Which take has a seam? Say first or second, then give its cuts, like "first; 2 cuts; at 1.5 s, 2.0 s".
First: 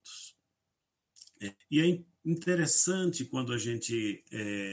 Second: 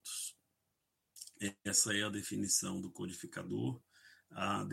first; 1 cut; at 1.6 s